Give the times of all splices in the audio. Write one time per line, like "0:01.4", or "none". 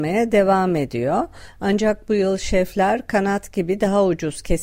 none